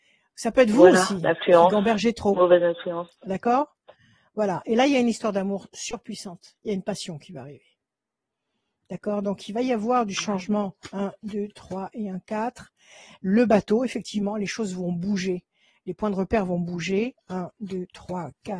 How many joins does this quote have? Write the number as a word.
zero